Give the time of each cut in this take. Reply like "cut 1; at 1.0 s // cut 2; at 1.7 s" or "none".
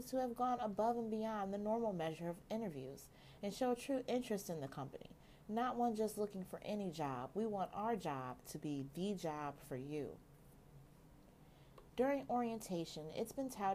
none